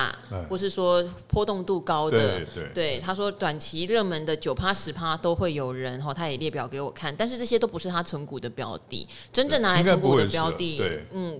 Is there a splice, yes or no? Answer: no